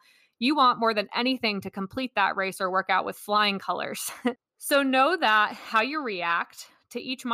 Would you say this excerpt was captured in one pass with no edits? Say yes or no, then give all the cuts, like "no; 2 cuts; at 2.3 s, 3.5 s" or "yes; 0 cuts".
no; 1 cut; at 4.4 s